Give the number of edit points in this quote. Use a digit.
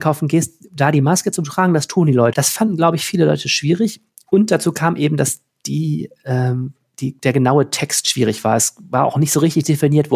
1